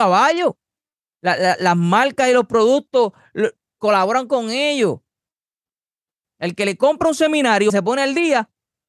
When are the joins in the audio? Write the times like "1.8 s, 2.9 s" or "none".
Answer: 1.1 s, 6.2 s, 7.7 s